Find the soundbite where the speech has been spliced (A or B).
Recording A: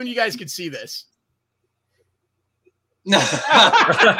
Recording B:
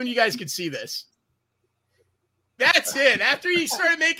B